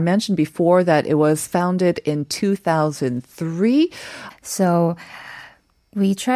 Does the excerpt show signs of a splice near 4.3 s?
yes; 1 cut; at 4.3 s

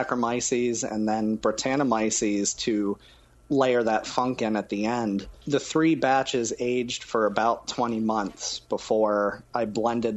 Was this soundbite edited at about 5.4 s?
no; 0 cuts

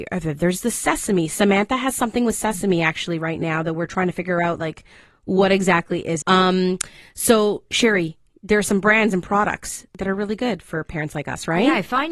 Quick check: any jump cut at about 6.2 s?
yes; 1 cut; at 6.2 s

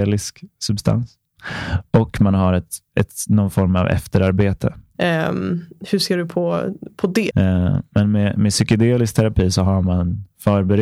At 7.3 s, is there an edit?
yes; 2 cuts; at 4.9 s, 7.3 s

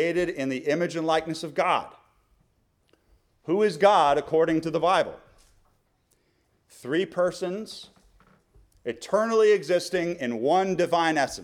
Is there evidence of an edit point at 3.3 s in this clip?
no; 1 cut; at 6.5 s

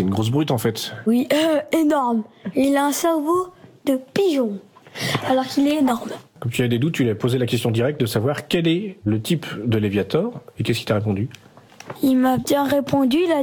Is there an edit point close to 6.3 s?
no; 0 cuts

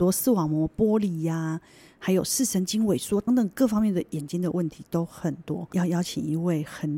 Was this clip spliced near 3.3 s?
yes; 1 cut; at 3.3 s

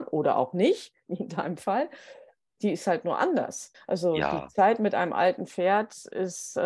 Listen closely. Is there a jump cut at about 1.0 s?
no; 2 cuts; at 2.6 s, 3.7 s

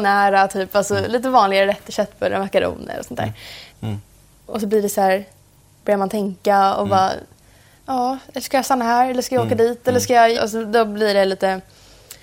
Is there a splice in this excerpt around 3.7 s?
yes; 2 cuts; at 3.7 s, 10.3 s

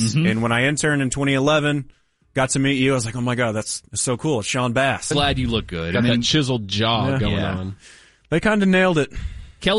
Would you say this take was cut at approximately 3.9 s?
no; 1 cut; at 5.1 s

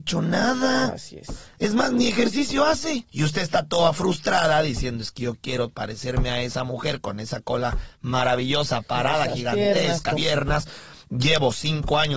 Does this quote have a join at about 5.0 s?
no; 2 cuts; at 3.1 s, 10.2 s

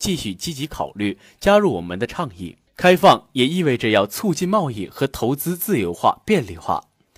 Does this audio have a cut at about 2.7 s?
yes; 1 cut; at 2.7 s

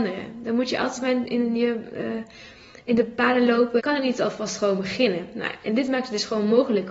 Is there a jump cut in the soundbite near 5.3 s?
no; 1 cut; at 3.8 s

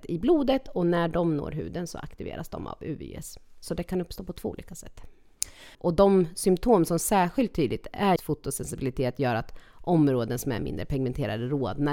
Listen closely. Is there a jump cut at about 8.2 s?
yes; 2 cuts; at 5.7 s, 8.2 s

